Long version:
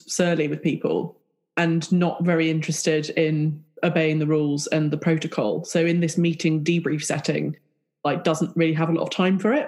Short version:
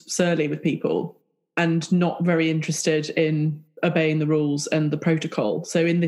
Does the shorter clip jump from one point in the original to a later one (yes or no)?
no